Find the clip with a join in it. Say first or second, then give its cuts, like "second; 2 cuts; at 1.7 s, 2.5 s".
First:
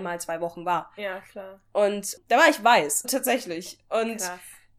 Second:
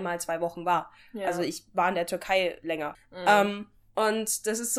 first; 2 cuts; at 1.0 s, 3.0 s